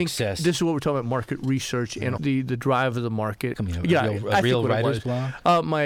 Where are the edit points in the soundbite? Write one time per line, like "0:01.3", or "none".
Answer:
0:02.2
0:03.5